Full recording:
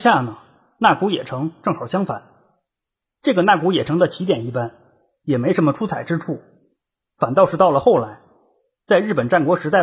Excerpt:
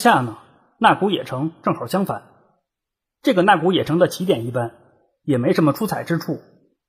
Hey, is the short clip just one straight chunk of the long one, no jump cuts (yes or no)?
yes